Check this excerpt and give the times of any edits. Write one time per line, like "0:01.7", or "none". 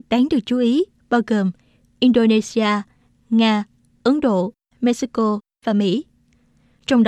none

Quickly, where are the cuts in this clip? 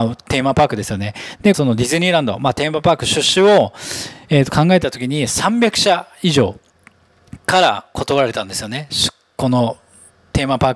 0:01.5

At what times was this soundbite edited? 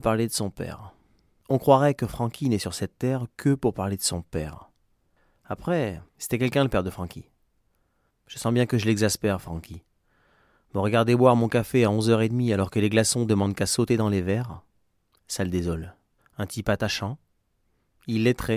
0:06.1
0:08.1
0:16.2

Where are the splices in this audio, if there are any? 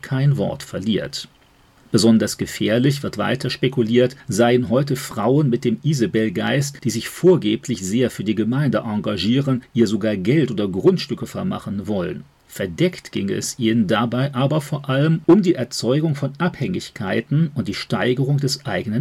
none

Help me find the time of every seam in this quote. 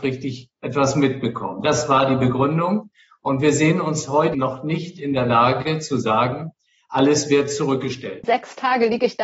0:04.3
0:08.2

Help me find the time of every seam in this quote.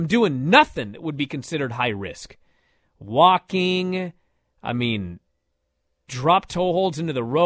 none

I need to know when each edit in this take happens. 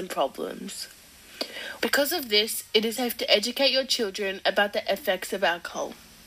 0:01.8
0:03.0

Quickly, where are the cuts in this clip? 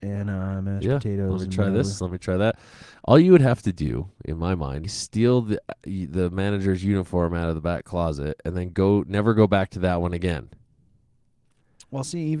0:04.8

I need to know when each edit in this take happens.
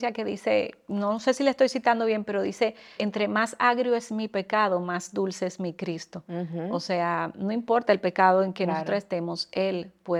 0:03.0

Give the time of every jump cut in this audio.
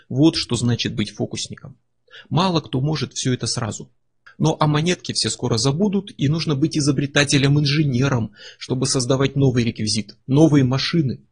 0:04.3

